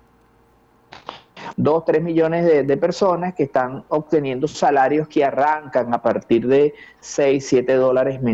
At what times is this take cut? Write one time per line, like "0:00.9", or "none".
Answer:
0:01.5